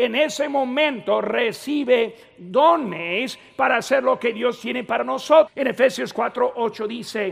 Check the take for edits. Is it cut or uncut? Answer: cut